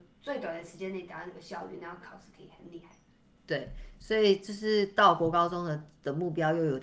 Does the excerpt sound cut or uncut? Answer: uncut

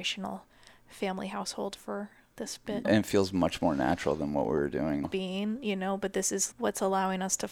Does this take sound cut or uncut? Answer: cut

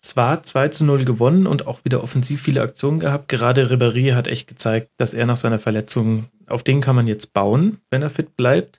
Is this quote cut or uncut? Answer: cut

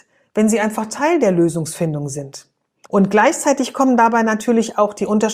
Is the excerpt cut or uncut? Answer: cut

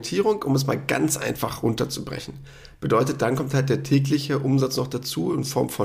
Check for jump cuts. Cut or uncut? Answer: cut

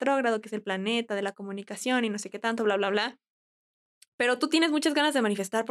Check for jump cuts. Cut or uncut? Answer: uncut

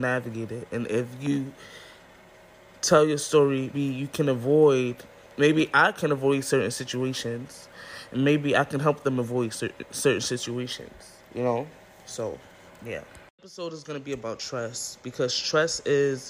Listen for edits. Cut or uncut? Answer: cut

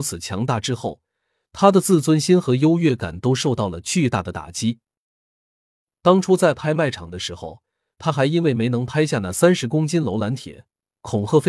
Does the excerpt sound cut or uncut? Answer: uncut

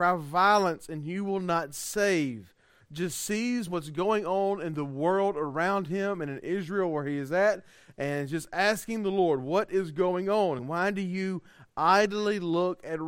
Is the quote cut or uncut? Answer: cut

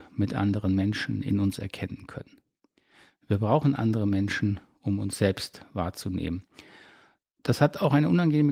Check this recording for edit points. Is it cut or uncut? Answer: uncut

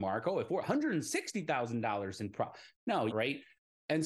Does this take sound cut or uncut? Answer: cut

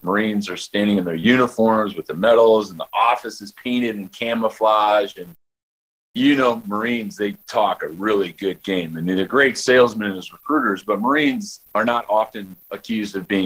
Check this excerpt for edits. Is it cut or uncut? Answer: uncut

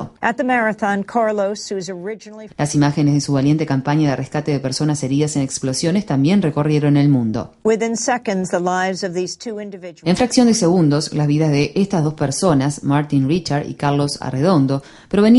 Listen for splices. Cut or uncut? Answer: cut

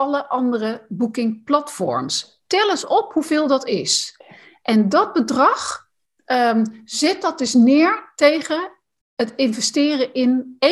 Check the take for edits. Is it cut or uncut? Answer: uncut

